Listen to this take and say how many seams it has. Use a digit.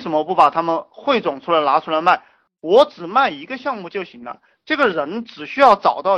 0